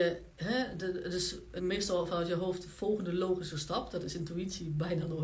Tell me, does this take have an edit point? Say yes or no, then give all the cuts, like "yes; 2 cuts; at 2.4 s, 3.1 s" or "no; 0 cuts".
yes; 1 cut; at 1.6 s